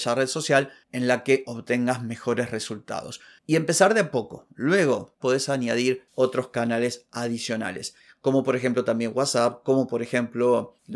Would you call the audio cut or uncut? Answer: cut